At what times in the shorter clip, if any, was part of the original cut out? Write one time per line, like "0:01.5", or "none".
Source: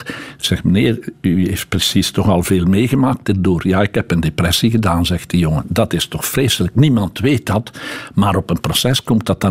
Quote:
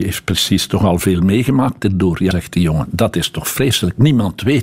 0:02.3